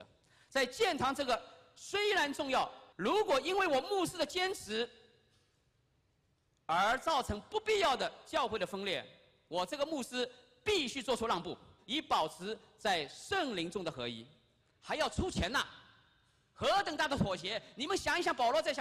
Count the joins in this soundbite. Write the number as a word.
three